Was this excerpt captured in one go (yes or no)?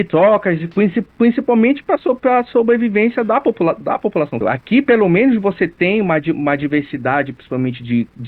no